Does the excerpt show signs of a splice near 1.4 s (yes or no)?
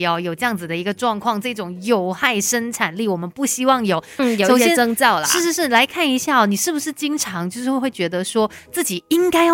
no